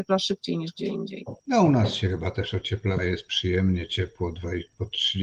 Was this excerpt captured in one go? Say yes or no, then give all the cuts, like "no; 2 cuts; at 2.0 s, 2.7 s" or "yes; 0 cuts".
no; 2 cuts; at 1.4 s, 3.0 s